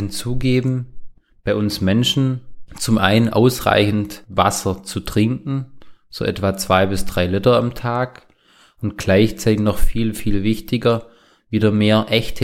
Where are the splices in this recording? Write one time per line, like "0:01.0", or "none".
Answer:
none